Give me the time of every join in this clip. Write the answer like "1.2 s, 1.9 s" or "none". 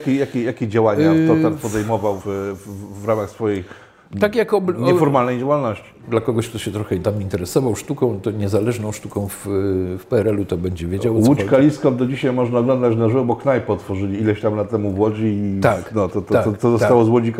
2.2 s, 6.0 s